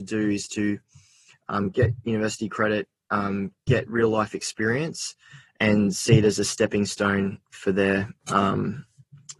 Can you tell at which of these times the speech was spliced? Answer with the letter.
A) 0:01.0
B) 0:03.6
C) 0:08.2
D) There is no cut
D